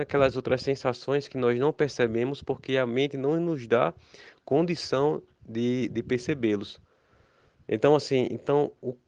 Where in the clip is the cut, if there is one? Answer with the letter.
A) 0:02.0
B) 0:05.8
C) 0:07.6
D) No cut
C